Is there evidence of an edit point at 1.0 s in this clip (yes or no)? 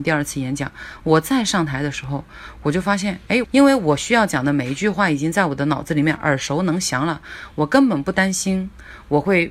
no